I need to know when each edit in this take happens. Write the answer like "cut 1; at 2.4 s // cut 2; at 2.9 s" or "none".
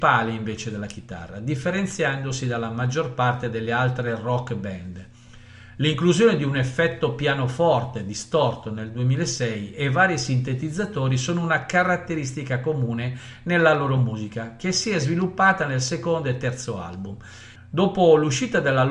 cut 1; at 17.6 s